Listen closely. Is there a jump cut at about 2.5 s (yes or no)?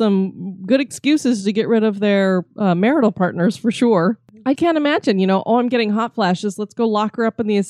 no